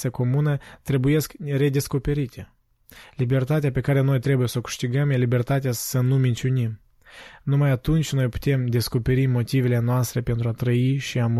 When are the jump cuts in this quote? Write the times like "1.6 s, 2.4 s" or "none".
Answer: none